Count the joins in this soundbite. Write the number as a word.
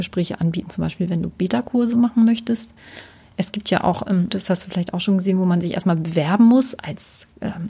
one